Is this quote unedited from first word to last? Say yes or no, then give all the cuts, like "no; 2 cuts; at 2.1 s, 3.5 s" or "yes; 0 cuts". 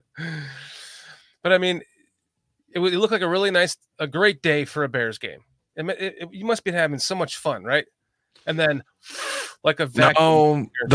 no; 1 cut; at 5.7 s